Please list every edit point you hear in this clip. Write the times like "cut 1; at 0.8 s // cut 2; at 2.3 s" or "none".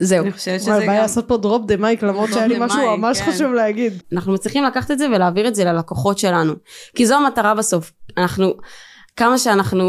cut 1; at 4.0 s